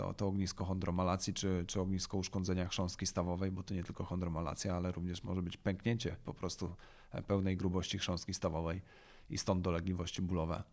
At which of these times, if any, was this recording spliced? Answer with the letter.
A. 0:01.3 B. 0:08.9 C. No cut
C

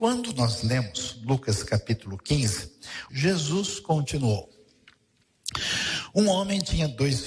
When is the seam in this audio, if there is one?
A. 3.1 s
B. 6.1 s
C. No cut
A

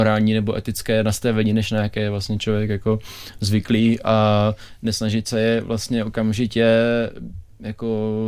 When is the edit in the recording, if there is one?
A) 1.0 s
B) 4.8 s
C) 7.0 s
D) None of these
D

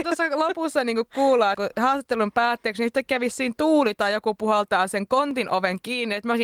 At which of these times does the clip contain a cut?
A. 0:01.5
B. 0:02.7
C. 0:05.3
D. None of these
A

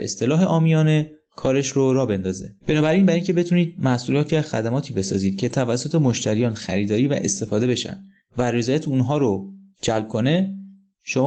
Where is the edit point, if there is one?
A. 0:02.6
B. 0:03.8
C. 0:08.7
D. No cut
A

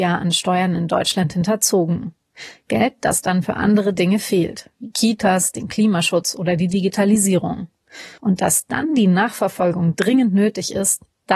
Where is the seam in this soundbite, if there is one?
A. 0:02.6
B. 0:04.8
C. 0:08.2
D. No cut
C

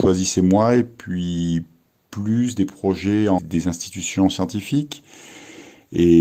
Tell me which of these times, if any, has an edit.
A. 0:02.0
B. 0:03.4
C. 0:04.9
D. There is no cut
B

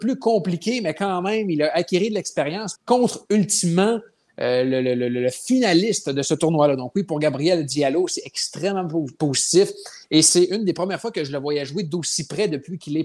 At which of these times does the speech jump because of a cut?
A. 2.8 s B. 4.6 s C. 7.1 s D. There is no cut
A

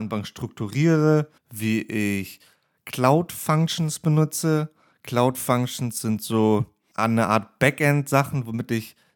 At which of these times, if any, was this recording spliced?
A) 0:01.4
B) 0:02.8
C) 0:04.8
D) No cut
A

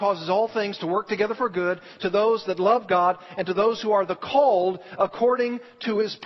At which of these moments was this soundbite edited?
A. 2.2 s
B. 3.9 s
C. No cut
C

